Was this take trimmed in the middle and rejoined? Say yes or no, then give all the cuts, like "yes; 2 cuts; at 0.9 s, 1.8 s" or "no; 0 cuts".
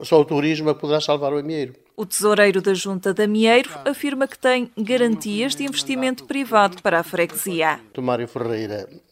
yes; 1 cut; at 7.9 s